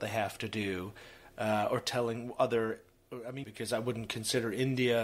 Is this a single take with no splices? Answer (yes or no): no